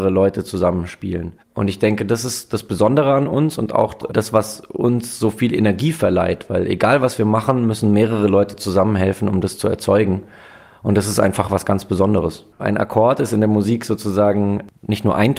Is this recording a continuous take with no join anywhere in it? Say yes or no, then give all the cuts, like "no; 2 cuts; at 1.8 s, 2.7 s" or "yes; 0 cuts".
no; 1 cut; at 12.5 s